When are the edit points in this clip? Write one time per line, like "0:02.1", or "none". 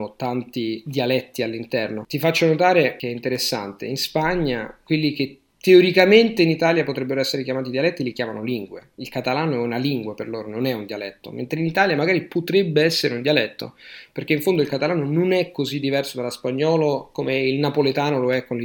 none